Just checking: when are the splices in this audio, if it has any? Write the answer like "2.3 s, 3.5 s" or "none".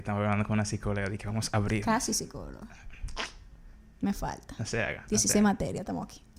none